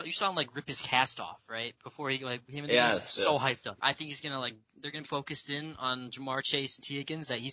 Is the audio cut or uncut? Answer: cut